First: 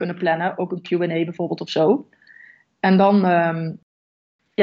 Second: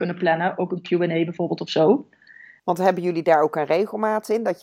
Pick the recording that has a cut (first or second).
second